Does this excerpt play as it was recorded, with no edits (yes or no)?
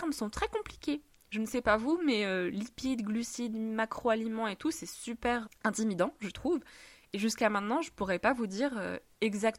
no